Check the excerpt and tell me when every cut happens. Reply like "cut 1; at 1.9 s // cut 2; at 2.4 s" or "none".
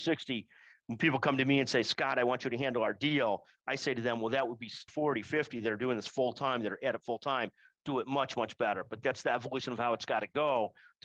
cut 1; at 4.9 s